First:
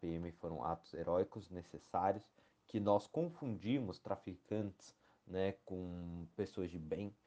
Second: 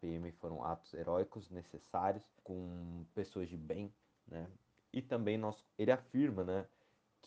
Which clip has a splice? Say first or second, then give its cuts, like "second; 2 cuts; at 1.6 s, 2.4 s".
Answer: second; 2 cuts; at 2.4 s, 5.7 s